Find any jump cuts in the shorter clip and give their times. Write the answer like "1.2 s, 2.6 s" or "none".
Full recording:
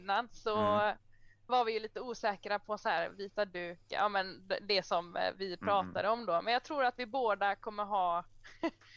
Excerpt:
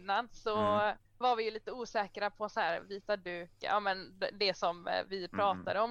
1.1 s